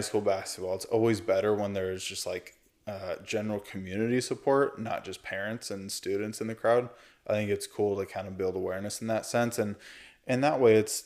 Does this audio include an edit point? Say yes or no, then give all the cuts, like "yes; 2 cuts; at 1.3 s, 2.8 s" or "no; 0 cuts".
no; 0 cuts